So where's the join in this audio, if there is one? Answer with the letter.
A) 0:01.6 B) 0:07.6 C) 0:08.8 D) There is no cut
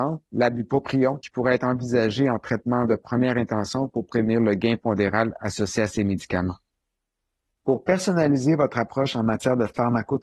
D